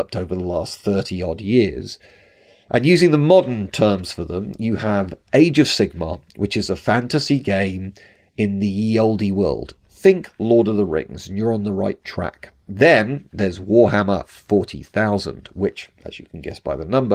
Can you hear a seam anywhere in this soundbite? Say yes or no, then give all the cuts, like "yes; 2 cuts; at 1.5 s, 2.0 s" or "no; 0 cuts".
no; 0 cuts